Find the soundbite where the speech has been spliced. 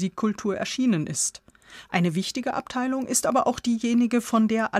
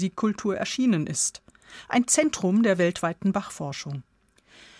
first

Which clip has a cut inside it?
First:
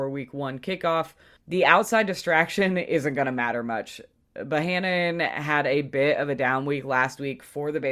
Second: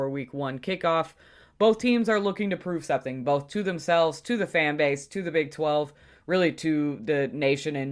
first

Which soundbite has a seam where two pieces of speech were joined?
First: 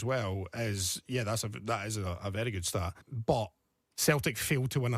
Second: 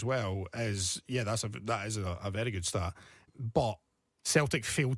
first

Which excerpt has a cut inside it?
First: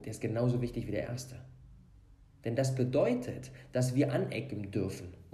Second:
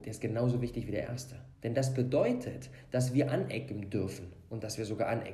second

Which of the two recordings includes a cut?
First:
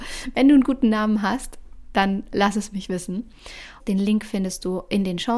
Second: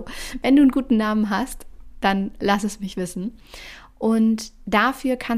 first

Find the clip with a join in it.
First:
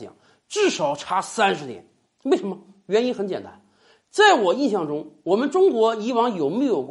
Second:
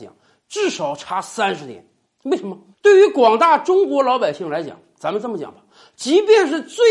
second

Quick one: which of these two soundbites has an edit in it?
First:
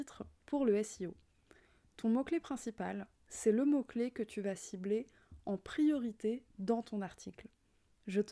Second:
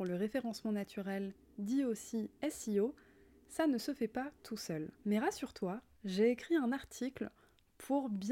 second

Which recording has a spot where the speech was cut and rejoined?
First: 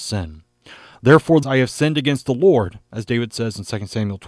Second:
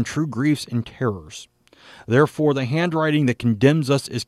first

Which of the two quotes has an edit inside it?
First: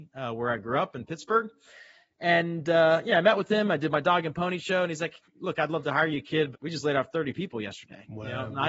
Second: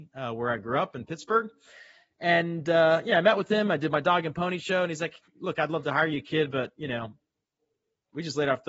first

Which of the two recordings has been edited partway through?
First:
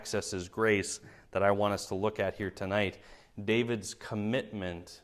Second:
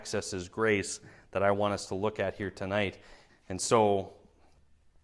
second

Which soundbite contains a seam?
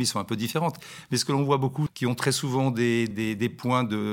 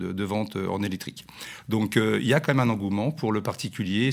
first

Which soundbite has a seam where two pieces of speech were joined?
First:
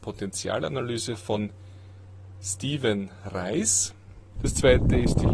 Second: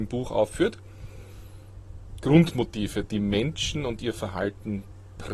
first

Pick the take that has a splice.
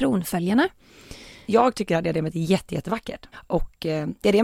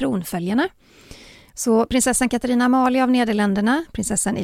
first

